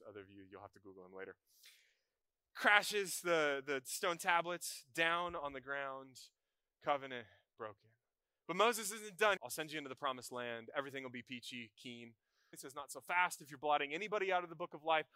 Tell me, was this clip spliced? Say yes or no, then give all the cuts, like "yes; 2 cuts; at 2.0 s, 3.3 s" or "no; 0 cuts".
yes; 2 cuts; at 9.4 s, 12.5 s